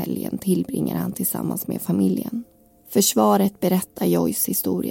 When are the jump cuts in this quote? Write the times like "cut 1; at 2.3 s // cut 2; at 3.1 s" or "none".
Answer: none